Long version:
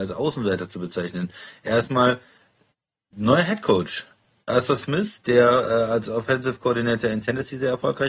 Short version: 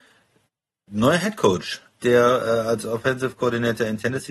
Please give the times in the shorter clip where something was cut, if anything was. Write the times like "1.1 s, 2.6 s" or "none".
2.0 s